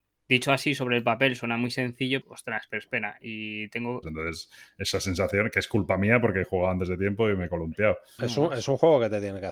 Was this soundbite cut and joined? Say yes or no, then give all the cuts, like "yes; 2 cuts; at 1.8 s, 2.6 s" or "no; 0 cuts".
yes; 3 cuts; at 2.2 s, 4.0 s, 8.2 s